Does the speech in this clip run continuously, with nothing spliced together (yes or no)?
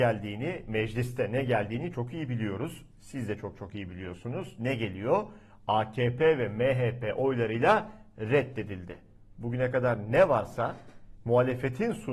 no